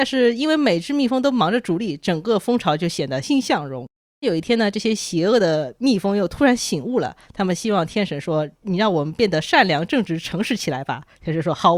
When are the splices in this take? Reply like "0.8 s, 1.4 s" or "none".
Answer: 3.2 s